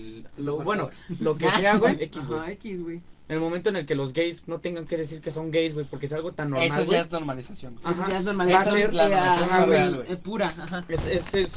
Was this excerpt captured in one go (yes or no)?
no